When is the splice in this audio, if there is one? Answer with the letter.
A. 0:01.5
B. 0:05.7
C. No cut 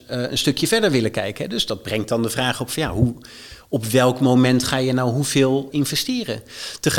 B